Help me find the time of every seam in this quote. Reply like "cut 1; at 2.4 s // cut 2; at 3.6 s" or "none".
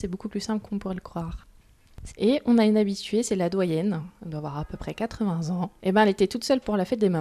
cut 1; at 2.1 s